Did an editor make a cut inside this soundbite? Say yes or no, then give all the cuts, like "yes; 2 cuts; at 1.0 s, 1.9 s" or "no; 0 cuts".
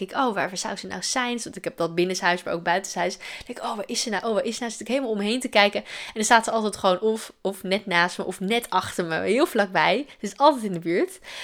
no; 0 cuts